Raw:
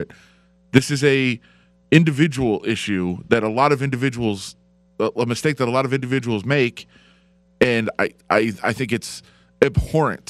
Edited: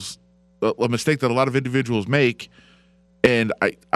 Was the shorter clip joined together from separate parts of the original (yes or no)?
no